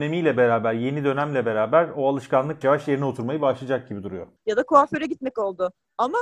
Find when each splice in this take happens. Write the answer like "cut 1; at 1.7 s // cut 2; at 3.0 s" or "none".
cut 1; at 2.6 s // cut 2; at 4.4 s